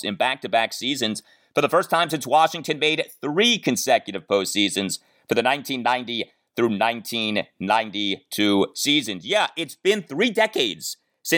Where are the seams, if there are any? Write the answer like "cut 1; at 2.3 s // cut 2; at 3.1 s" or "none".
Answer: none